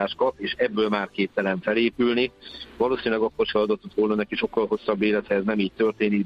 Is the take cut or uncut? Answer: uncut